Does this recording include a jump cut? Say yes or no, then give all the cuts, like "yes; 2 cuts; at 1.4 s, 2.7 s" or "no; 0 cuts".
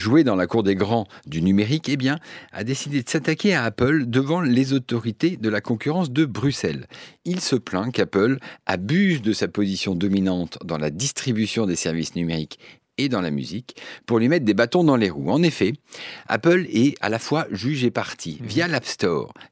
no; 0 cuts